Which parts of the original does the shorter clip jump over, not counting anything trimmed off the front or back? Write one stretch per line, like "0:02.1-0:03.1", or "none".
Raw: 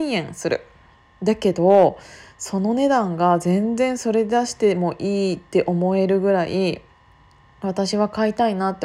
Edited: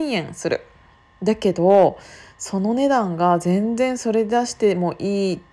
none